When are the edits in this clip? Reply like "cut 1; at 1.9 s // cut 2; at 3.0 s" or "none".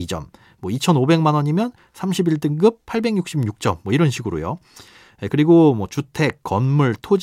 cut 1; at 5.3 s